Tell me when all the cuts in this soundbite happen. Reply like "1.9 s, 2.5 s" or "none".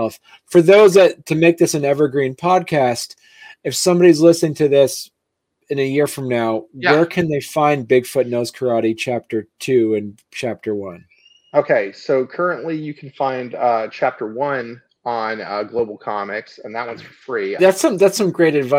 17.6 s